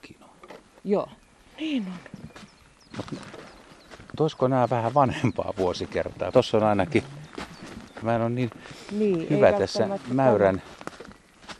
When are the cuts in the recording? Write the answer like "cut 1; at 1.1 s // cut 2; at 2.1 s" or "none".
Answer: cut 1; at 4.1 s // cut 2; at 6.3 s // cut 3; at 8.0 s